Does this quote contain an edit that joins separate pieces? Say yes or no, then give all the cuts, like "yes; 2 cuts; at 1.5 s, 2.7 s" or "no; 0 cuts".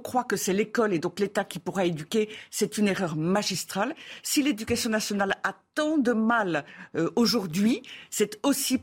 no; 0 cuts